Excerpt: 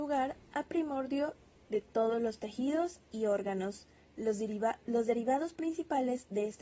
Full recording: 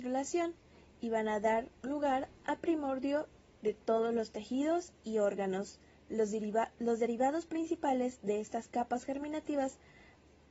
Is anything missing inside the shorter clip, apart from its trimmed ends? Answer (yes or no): no